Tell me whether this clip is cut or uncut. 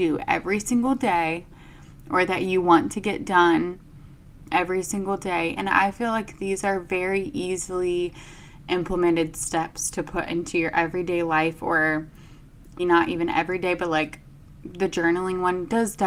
cut